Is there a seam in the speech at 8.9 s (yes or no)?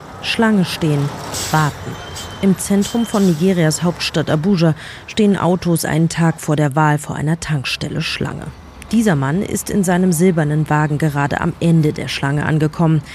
yes